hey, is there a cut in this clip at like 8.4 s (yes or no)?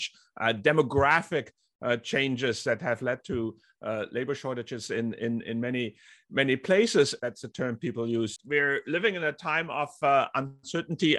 yes